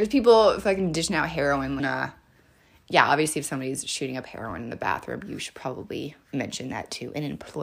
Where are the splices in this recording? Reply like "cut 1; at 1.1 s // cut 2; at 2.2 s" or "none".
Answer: cut 1; at 1.8 s